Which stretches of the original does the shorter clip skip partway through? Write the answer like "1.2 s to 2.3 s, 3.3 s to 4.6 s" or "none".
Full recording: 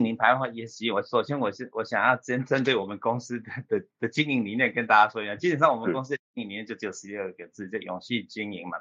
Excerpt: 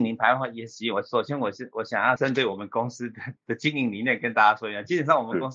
2.2 s to 2.5 s, 3.7 s to 3.9 s